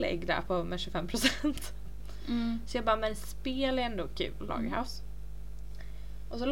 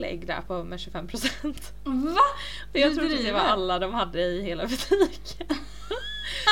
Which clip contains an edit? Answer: first; 2 cuts; at 1.8 s, 4.5 s

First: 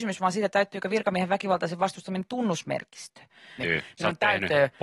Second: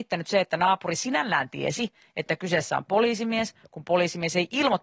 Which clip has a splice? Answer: first; 1 cut; at 3.6 s

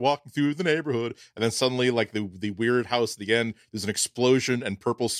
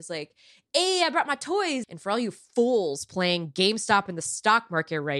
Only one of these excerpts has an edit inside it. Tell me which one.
second; 1 cut; at 1.8 s

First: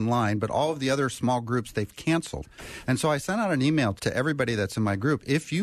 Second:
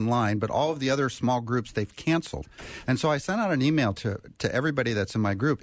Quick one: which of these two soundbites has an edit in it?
first; 1 cut; at 4.0 s

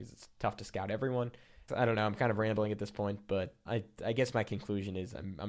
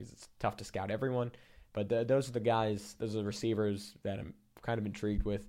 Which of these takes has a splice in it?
first; 2 cuts; at 1.7 s, 3.7 s

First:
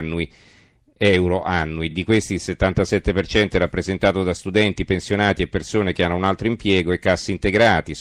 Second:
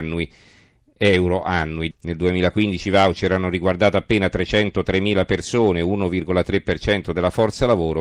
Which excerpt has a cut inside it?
second; 1 cut; at 1.9 s

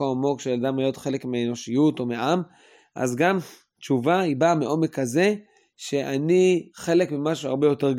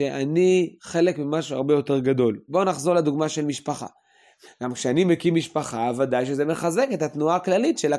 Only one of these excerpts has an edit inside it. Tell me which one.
second; 2 cuts; at 2.5 s, 4.4 s

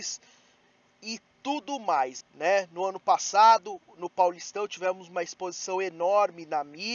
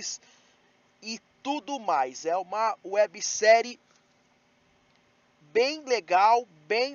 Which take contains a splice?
first; 1 cut; at 2.2 s

